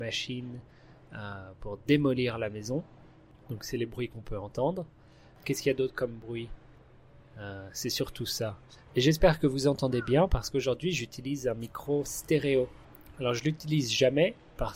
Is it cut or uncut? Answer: uncut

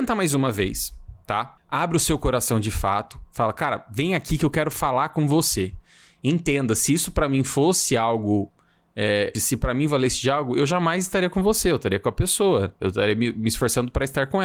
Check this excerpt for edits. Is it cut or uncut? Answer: cut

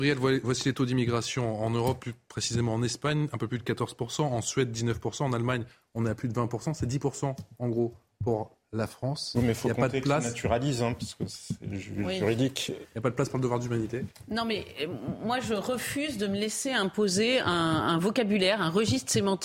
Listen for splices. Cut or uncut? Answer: uncut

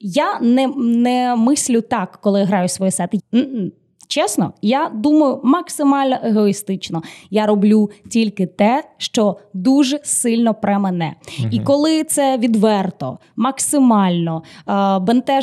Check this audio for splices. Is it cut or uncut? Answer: cut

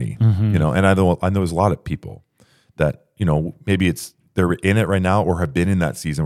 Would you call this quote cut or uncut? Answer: uncut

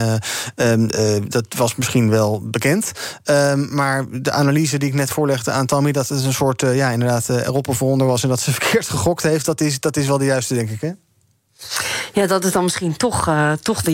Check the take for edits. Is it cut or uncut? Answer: uncut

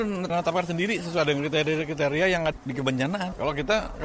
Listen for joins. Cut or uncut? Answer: cut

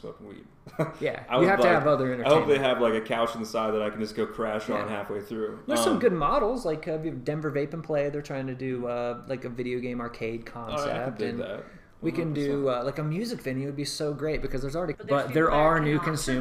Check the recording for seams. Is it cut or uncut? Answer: cut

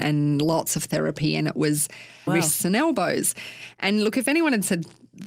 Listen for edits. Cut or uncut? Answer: cut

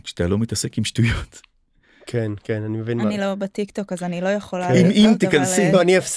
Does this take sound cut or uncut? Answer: uncut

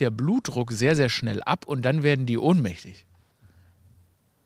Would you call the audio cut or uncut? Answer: uncut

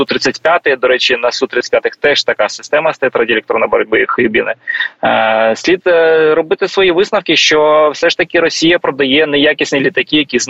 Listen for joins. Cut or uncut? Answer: uncut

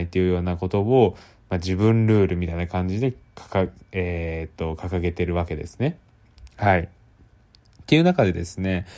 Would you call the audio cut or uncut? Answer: uncut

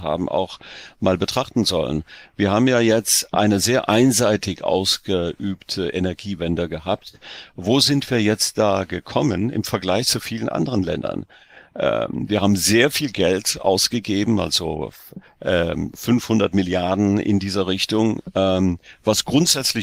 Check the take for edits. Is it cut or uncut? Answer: uncut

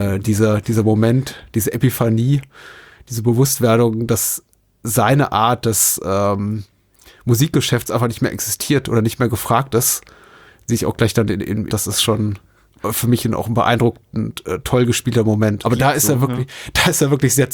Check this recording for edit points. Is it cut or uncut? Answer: cut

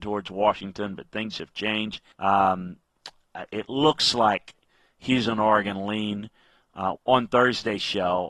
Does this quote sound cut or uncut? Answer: cut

